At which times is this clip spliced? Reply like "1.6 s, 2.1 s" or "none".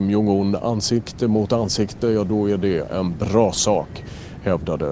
none